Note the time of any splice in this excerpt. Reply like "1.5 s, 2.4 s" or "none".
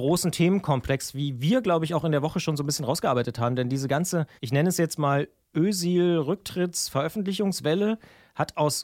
4.4 s